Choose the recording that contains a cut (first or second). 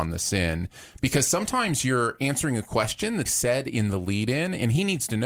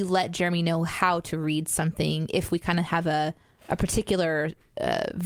first